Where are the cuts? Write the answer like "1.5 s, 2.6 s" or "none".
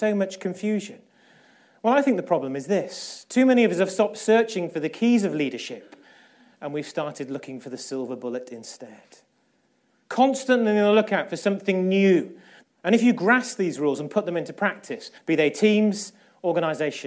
12.6 s, 15.2 s